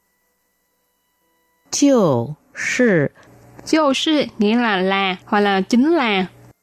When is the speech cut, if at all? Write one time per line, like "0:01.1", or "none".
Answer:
0:05.2